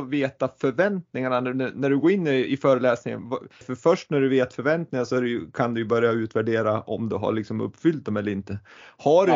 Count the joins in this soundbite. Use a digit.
1